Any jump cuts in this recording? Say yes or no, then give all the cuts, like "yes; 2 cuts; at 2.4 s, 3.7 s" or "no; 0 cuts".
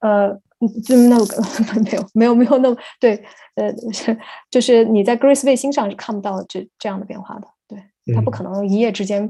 yes; 1 cut; at 6.4 s